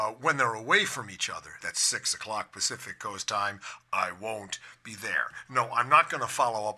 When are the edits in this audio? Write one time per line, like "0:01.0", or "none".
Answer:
0:01.6